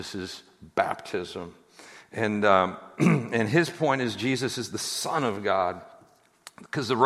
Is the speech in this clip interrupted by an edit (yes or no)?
no